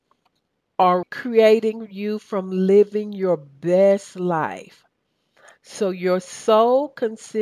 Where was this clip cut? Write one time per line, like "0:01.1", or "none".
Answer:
0:01.0